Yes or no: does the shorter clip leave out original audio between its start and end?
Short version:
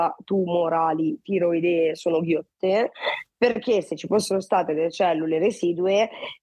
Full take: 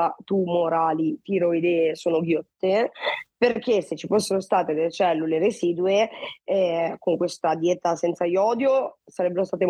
no